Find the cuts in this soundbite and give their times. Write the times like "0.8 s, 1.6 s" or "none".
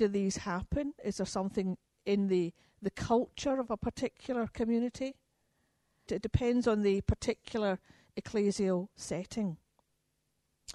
6.1 s